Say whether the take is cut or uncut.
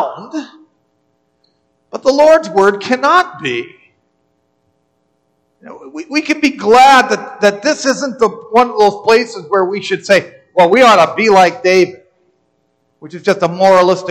uncut